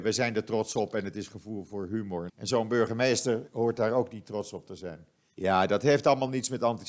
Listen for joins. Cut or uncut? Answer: cut